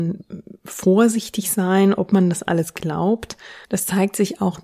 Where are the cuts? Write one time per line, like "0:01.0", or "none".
0:03.6